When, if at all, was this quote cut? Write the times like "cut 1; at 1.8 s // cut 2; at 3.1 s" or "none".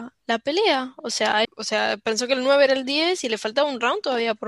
cut 1; at 1.4 s